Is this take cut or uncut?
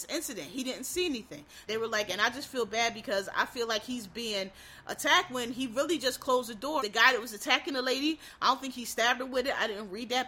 cut